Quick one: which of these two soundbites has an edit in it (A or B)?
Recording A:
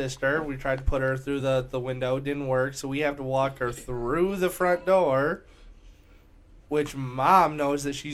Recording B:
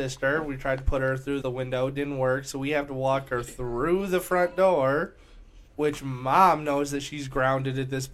B